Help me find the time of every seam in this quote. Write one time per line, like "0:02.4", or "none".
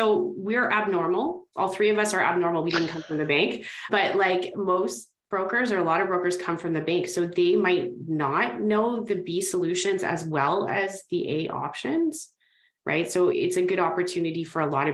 none